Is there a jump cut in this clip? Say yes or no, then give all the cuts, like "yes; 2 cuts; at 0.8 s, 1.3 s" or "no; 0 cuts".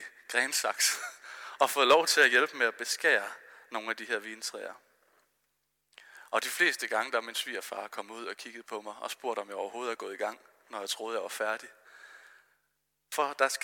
no; 0 cuts